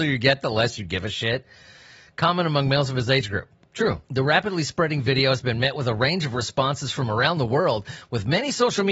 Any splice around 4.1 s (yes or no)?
yes